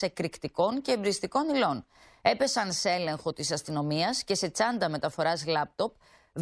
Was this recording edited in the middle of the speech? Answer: no; 0 cuts

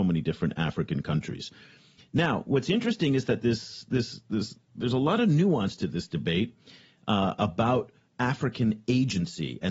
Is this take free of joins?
yes; 0 cuts

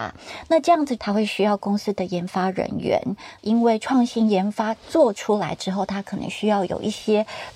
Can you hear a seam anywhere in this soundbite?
yes; 2 cuts; at 1.0 s, 3.4 s

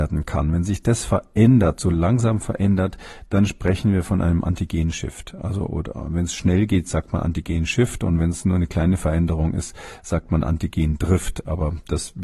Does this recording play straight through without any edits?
yes; 0 cuts

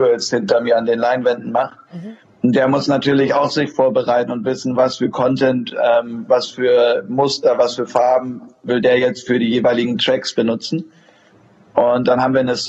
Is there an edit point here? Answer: no; 0 cuts

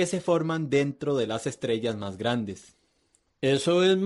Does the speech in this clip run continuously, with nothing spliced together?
yes; 0 cuts

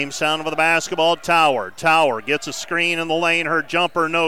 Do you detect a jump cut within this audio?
no; 0 cuts

